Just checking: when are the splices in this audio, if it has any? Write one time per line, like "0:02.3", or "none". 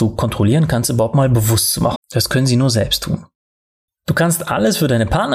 0:02.0
0:03.9

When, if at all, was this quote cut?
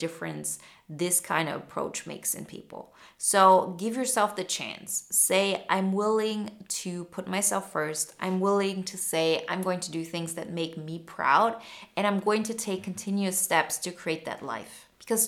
none

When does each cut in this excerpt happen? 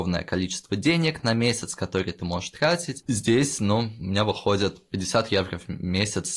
0:03.0

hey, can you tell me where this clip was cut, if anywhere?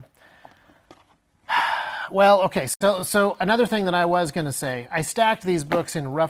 none

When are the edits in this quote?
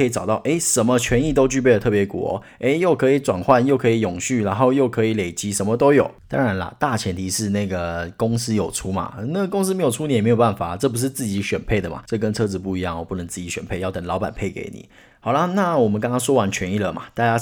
none

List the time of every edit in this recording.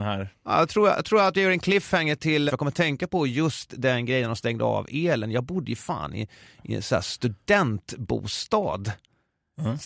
0:02.5

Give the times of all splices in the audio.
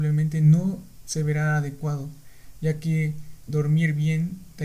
0:03.5

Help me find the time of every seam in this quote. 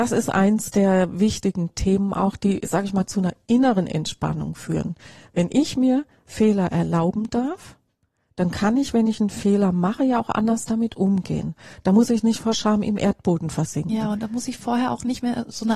none

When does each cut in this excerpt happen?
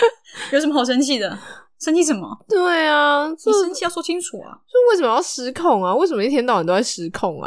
none

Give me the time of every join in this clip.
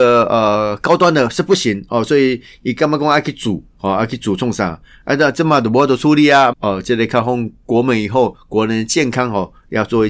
0:06.5

